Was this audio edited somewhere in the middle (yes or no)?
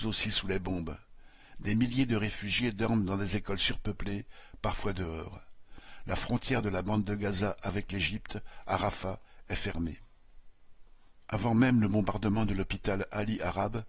no